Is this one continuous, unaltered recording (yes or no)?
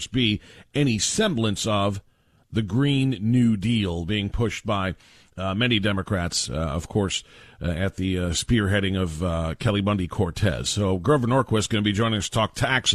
yes